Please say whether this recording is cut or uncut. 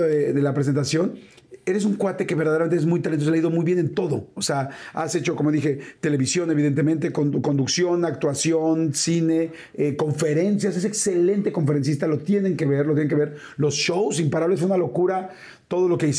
uncut